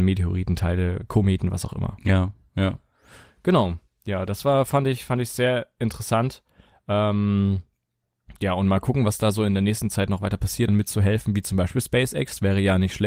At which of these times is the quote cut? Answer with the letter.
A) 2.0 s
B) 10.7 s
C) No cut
B